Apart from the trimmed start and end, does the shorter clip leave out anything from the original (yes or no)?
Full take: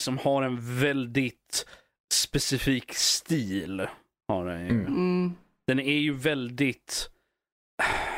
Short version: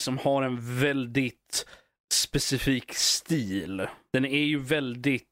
yes